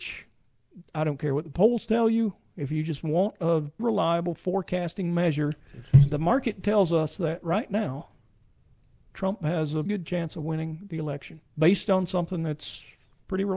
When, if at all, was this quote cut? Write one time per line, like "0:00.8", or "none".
0:03.8
0:09.9
0:11.5